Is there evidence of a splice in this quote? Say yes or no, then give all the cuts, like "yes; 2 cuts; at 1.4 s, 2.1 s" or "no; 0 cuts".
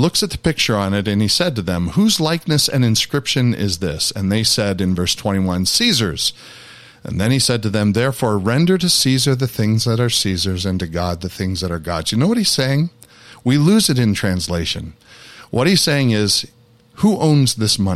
no; 0 cuts